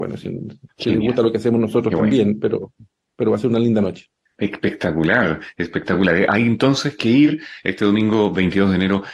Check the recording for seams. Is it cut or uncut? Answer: uncut